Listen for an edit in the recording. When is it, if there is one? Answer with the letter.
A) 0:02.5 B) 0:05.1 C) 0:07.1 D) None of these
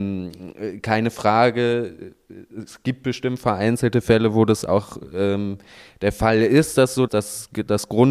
C